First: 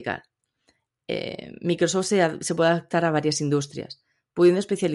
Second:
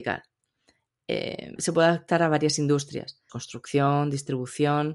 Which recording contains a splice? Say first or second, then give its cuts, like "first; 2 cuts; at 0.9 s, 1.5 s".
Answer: second; 2 cuts; at 1.6 s, 3.3 s